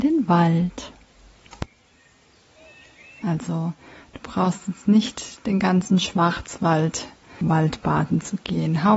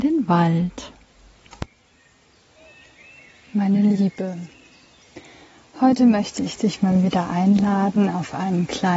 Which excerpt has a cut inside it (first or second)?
first